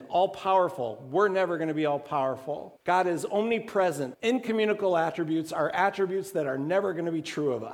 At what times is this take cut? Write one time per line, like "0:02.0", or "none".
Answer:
0:02.8
0:04.1